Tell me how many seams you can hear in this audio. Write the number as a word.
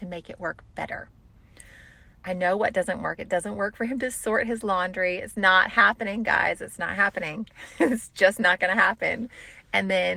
zero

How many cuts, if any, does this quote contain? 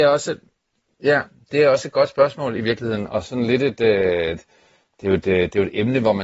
zero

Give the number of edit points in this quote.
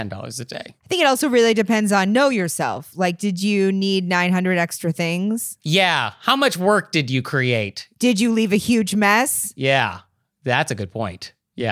zero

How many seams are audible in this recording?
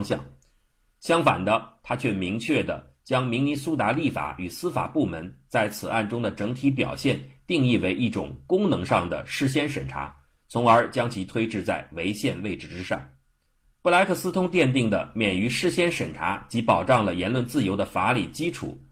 one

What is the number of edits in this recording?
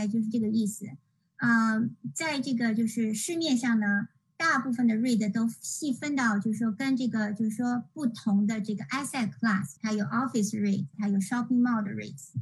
two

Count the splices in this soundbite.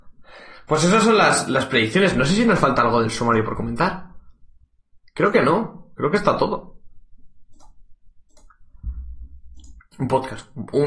one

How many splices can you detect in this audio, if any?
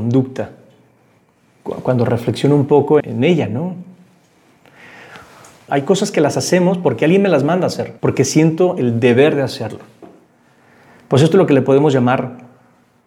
three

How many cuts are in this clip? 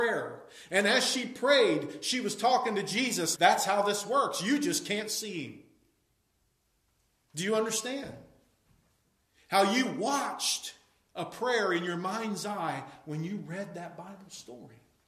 one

